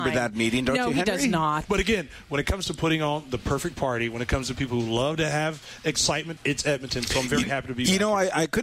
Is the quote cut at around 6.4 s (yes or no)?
yes